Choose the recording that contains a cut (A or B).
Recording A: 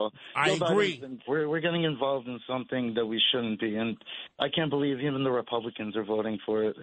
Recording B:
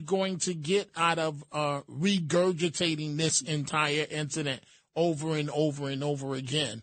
A